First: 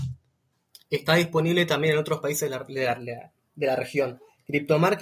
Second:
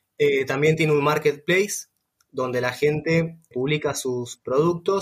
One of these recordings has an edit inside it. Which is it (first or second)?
second